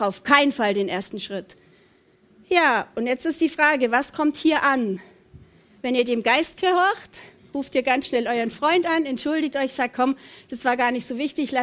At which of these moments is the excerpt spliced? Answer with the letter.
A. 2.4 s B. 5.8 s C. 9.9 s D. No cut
B